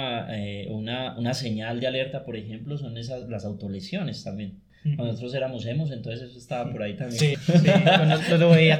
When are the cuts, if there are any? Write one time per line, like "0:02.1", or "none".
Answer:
0:07.3